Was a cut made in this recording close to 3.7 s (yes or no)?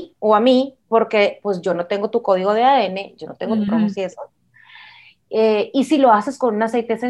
yes